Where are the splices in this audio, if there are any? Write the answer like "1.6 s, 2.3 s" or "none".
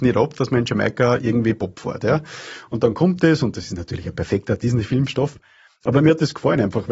none